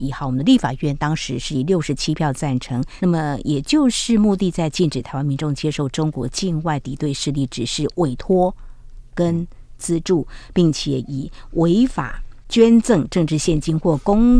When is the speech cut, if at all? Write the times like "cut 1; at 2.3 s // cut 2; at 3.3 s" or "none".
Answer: cut 1; at 3.0 s